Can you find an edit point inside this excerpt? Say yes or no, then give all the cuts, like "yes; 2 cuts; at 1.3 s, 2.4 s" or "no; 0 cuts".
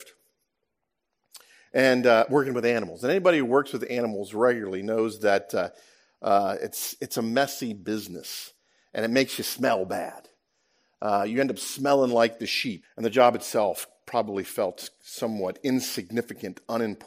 yes; 1 cut; at 12.8 s